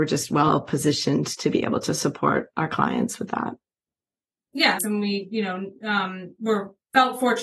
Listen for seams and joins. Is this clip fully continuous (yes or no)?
no